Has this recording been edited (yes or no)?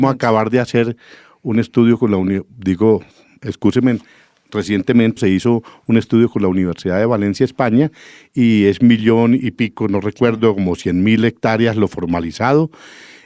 yes